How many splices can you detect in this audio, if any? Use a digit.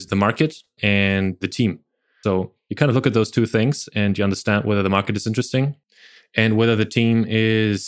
1